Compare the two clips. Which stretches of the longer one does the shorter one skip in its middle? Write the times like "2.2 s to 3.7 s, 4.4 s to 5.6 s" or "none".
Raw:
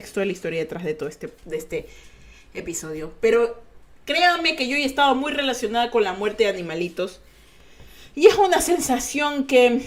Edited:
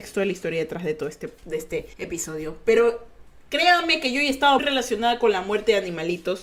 1.9 s to 2.5 s, 5.1 s to 5.3 s